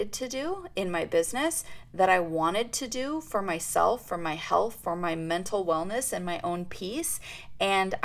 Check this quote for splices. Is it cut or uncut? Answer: uncut